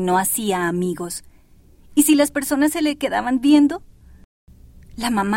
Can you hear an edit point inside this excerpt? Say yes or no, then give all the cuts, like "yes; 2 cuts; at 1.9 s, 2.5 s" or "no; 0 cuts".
no; 0 cuts